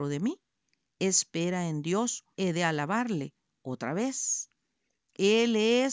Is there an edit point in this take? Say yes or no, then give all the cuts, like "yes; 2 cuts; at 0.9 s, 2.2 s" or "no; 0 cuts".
yes; 1 cut; at 2.3 s